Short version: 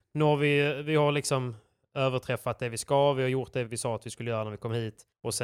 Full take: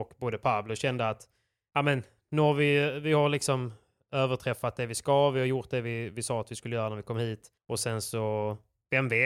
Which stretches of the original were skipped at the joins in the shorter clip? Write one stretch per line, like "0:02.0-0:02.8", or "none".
0:05.8-0:06.1

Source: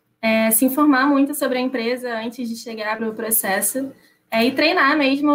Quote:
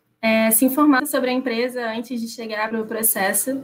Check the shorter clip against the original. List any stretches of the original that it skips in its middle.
0:01.0-0:01.3

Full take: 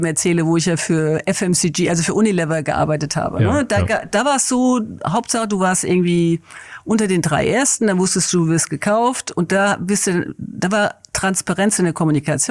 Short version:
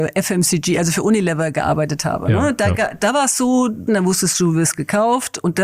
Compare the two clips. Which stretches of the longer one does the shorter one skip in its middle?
0:05.0-0:07.8

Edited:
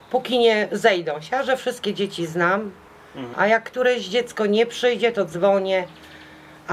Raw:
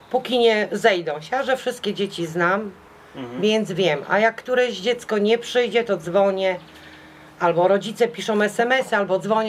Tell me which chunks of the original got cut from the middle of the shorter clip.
0:03.3-0:04.0

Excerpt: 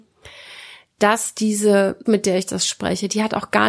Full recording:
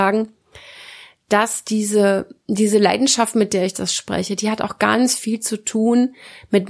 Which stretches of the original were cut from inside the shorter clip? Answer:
0:02.3-0:03.3

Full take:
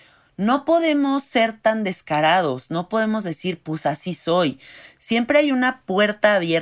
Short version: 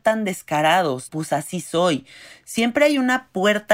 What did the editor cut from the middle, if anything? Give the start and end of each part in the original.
0:02.7-0:03.6

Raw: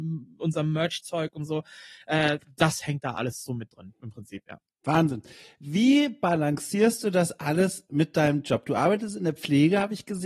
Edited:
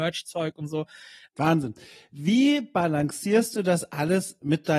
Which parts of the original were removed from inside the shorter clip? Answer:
0:02.0-0:04.8

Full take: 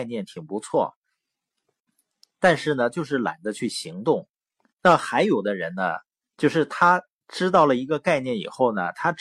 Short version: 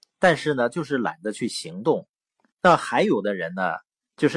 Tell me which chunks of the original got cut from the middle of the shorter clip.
none

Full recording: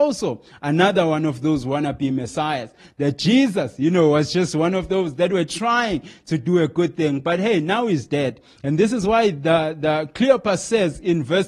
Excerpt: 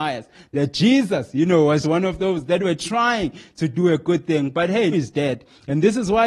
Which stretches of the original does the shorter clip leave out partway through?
0:04.3-0:04.5
0:07.6-0:07.9

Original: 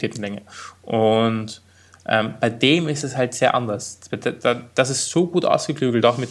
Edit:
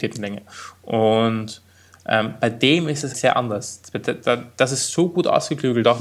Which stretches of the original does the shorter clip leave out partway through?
0:03.1-0:03.3

